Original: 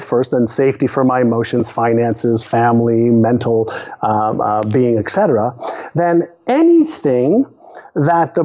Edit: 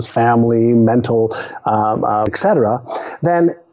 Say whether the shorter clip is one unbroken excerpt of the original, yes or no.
no